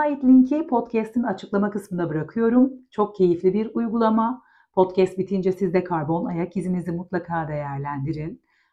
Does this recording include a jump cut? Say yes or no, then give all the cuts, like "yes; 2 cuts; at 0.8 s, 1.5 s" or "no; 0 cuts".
no; 0 cuts